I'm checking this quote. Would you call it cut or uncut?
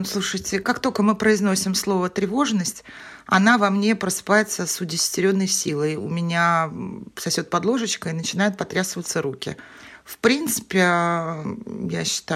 uncut